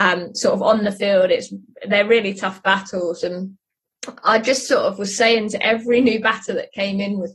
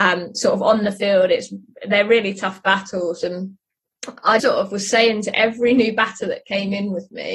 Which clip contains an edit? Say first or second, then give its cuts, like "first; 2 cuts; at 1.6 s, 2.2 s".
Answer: second; 1 cut; at 4.4 s